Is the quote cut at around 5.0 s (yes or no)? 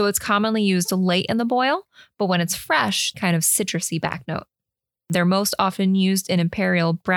no